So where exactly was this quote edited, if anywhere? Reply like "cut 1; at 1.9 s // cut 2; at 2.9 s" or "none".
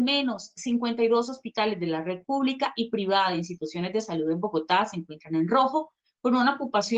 none